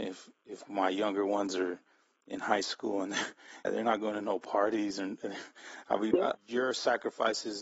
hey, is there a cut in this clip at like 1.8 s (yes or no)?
no